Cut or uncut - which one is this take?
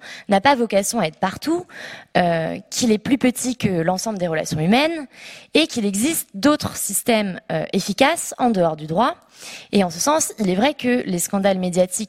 uncut